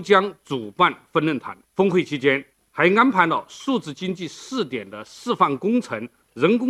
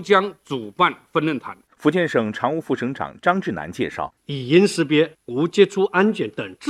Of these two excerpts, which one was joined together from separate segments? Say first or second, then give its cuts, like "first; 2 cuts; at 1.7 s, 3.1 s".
second; 2 cuts; at 1.7 s, 4.2 s